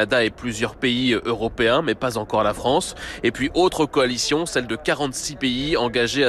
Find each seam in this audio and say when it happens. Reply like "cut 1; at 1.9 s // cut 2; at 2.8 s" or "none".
none